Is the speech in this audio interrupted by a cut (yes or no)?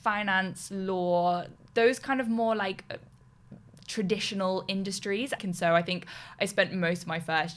yes